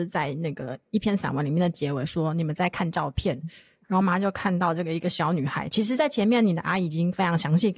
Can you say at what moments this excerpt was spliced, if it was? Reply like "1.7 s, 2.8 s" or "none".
4.0 s